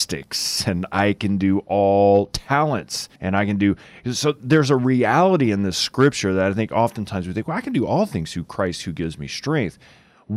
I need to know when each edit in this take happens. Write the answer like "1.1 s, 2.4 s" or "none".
3.2 s

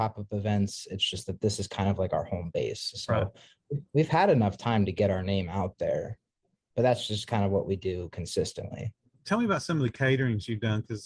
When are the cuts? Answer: none

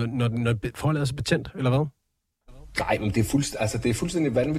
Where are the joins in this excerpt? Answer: none

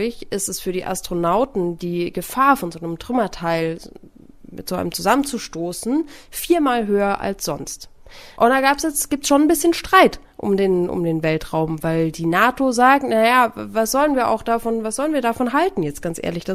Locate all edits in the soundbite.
8.3 s

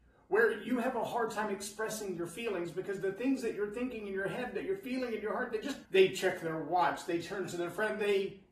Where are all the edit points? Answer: 5.8 s

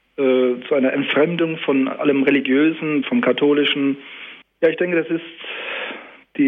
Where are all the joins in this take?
3.0 s, 4.4 s

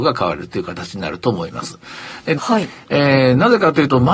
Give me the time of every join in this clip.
2.4 s

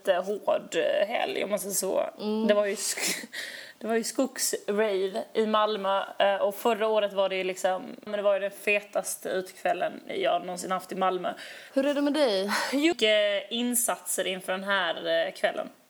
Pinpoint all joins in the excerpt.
8.1 s, 11.7 s, 12.9 s

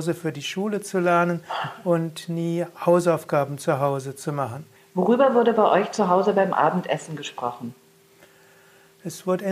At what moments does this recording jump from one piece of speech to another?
4.8 s

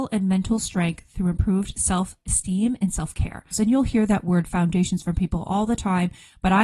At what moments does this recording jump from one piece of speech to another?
3.5 s

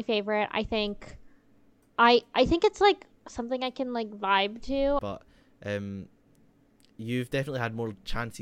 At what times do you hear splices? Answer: 5.0 s

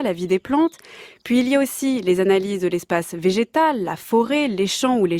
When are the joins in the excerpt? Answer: none

